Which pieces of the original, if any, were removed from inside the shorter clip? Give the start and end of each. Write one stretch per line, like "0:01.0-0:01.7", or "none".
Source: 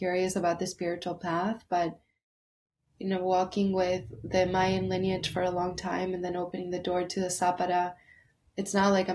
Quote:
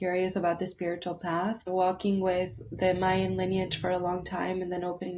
0:01.7-0:03.2